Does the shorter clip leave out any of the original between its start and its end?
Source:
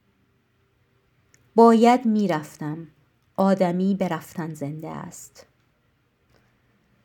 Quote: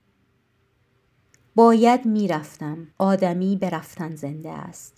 yes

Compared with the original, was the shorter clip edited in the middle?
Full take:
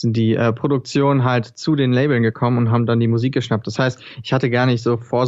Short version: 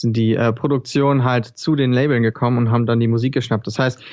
no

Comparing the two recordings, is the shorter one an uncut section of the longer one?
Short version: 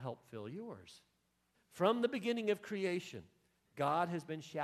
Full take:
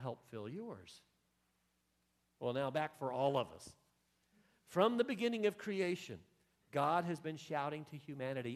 no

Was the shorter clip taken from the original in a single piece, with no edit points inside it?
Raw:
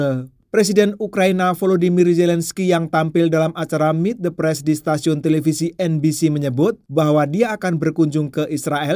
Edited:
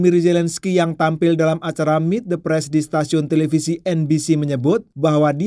yes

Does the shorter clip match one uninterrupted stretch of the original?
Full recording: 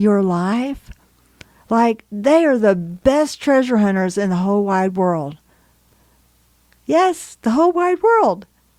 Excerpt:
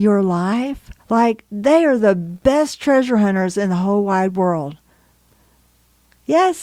no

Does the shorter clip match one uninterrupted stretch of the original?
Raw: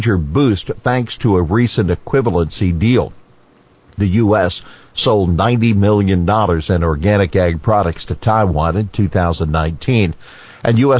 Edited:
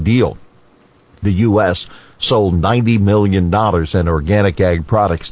yes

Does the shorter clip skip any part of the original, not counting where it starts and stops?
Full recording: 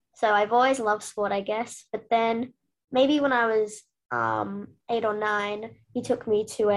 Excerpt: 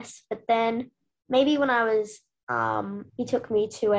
yes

